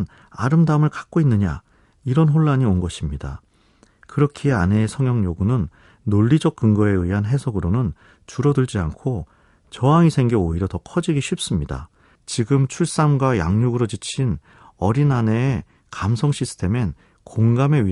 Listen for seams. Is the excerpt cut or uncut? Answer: cut